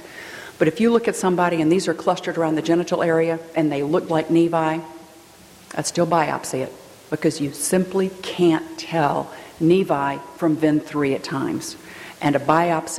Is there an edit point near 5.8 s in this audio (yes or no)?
no